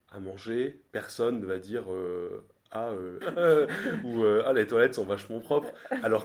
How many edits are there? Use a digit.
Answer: 1